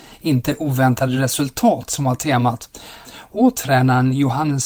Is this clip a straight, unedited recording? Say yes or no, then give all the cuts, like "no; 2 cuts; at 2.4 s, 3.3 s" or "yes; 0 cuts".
no; 1 cut; at 3.0 s